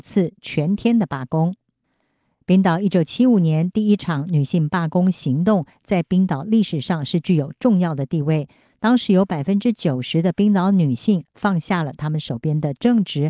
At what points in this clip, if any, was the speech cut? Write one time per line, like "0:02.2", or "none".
none